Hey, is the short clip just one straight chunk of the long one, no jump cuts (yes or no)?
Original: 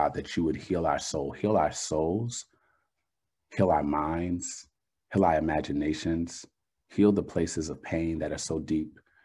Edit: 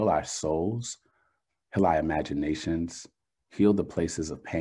no